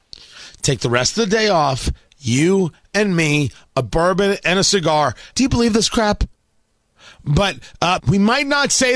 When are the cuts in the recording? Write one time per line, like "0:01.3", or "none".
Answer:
0:05.3
0:08.0